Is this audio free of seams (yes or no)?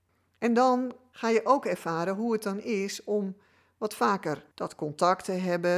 no